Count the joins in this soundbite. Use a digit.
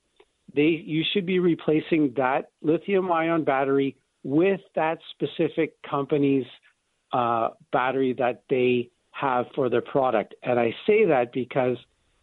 0